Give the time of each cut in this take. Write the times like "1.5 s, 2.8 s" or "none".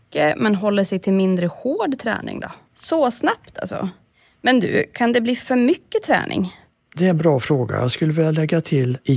2.6 s